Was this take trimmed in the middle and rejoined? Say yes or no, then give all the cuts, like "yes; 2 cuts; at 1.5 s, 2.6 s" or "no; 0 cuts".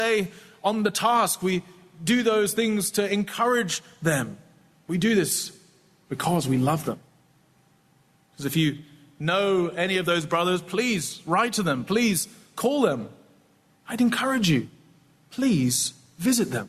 no; 0 cuts